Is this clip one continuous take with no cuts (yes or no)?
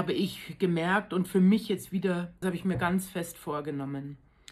no